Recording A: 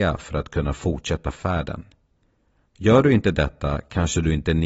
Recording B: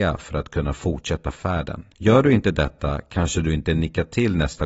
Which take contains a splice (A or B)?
B